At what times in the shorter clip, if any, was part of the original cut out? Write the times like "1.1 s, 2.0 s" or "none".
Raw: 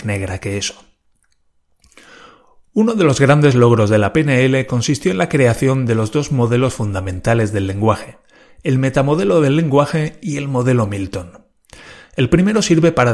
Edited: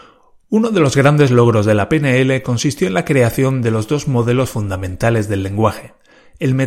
none